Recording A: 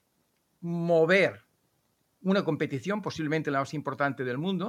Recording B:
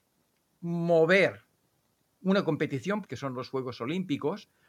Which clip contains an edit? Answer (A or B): B